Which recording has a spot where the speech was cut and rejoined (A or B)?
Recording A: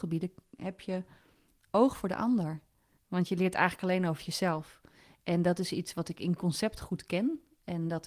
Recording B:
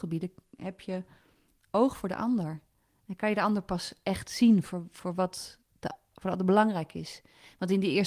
A